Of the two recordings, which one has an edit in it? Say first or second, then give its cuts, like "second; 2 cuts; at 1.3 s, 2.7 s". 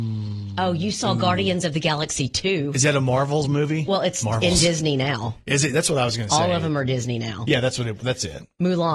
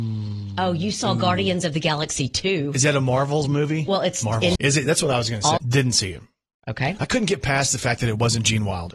second; 2 cuts; at 4.6 s, 5.6 s